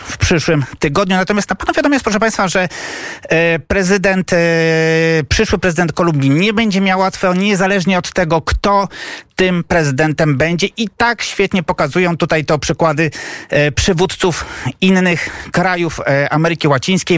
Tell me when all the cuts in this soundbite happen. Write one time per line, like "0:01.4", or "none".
none